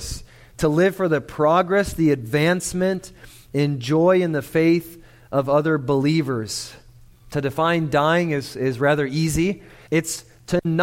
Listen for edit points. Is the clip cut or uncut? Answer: cut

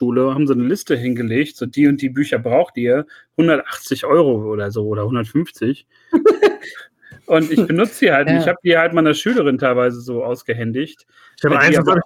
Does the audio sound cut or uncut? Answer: cut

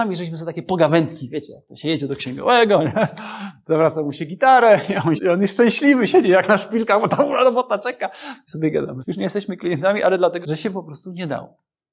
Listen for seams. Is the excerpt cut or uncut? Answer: cut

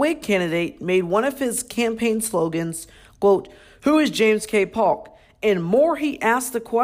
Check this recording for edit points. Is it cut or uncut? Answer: uncut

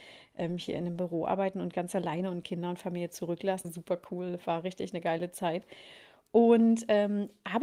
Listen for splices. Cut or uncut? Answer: cut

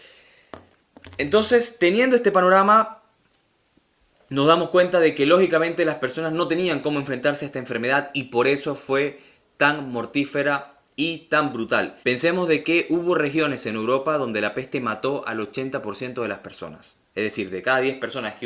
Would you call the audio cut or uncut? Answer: cut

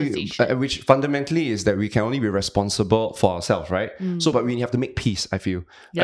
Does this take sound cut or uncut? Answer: uncut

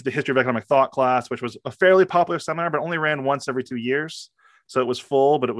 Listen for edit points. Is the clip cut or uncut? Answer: uncut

